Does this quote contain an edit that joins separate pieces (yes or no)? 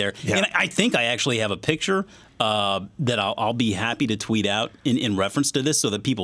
no